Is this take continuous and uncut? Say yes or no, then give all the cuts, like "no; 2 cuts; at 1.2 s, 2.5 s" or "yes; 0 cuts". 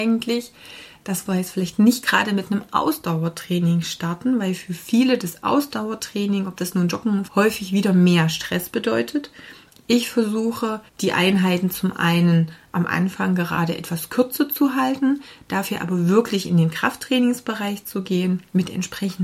no; 2 cuts; at 7.3 s, 10.9 s